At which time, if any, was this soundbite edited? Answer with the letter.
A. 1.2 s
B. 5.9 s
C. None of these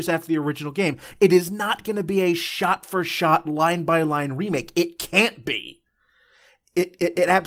C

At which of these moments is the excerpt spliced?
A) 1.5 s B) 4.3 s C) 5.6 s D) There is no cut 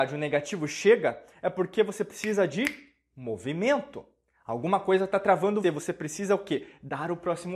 C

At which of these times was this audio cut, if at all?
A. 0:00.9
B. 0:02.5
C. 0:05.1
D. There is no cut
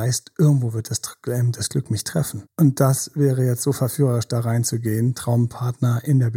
B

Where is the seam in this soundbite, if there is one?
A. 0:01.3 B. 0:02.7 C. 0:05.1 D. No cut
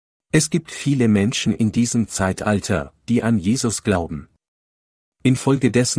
C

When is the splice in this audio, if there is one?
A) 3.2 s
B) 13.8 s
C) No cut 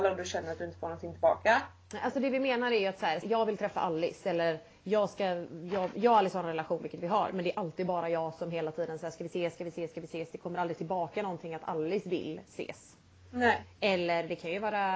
A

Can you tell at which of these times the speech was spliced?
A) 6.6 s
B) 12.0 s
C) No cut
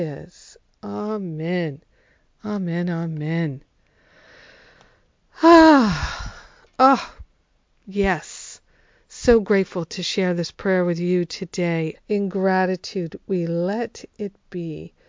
B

